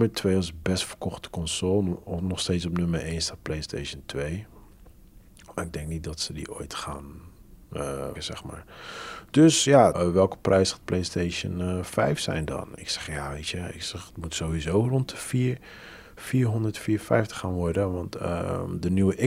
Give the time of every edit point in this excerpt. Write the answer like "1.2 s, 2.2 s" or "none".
8.1 s, 9.9 s